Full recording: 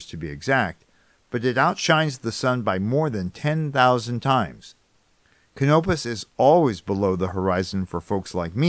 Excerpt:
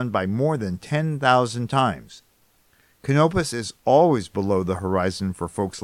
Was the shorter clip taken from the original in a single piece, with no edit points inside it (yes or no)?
yes